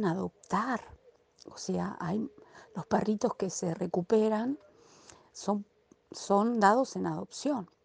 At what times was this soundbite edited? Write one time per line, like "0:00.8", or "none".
none